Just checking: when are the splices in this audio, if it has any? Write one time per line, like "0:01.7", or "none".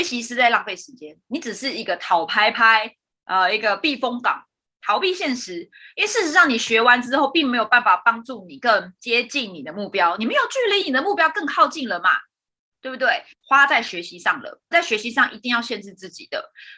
0:13.3
0:14.7